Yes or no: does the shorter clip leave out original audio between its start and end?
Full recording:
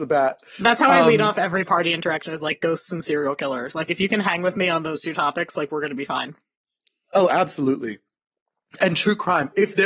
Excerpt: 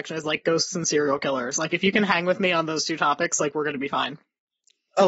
no